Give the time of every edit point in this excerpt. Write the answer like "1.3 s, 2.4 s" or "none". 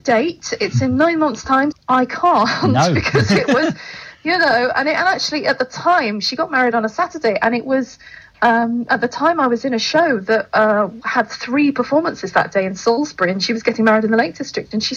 1.7 s